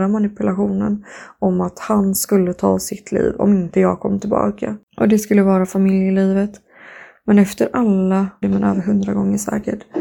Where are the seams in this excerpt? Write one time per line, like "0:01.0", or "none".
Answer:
0:04.9
0:08.4